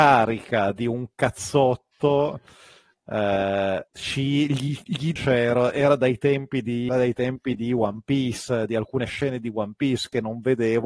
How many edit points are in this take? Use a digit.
3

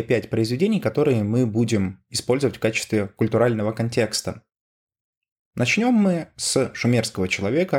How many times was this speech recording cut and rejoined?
1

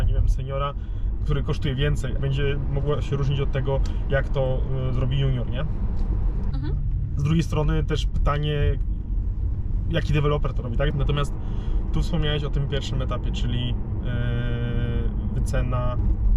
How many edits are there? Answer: 3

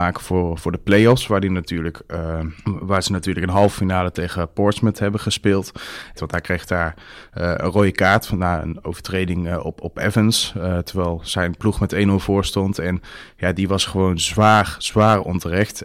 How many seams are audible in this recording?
2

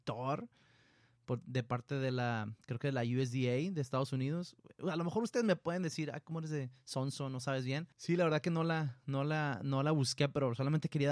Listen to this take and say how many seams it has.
1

